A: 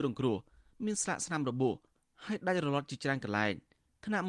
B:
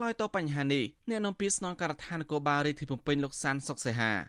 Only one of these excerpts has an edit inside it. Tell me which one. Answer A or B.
B